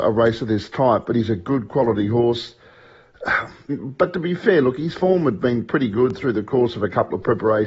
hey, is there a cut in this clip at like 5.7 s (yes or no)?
no